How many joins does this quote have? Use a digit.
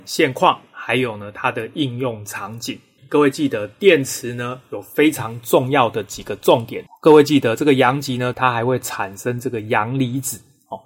3